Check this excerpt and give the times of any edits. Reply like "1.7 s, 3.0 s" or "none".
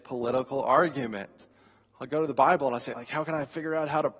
2.9 s